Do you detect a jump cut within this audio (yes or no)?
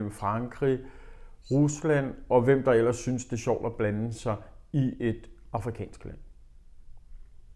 no